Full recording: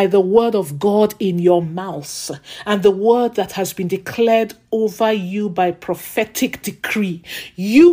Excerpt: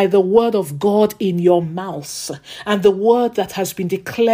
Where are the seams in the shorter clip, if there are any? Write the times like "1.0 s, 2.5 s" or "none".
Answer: none